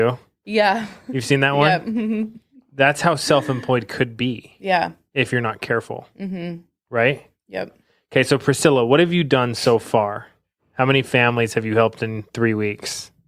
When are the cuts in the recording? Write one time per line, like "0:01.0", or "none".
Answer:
none